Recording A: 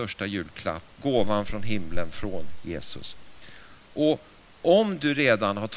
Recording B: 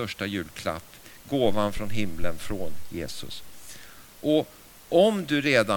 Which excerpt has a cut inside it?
A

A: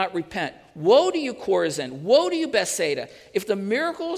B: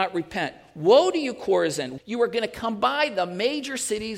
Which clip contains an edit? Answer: B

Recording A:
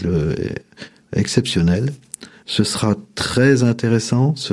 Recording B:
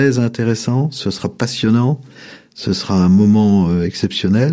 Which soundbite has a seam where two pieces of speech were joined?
A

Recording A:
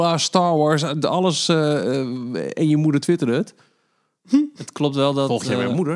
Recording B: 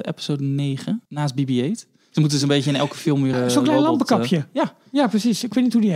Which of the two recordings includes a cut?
B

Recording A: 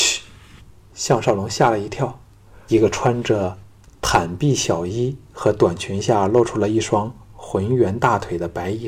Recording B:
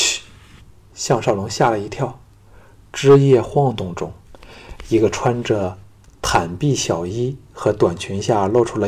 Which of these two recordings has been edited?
A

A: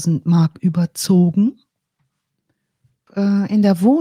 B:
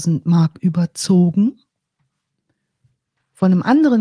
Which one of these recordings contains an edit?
A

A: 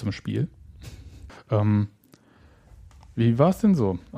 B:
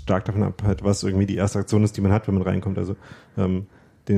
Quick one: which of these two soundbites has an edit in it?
A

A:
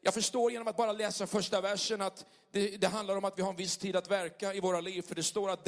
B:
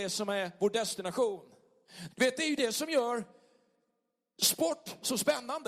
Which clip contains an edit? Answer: B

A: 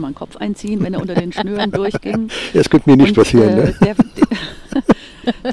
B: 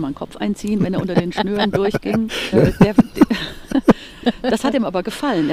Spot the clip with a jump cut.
B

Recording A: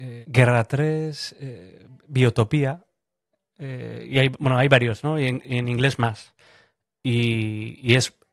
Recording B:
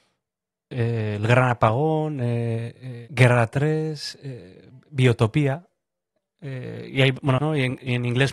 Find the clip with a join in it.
B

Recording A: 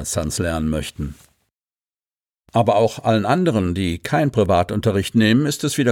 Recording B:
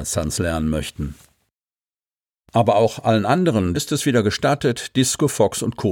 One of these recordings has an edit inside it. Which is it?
B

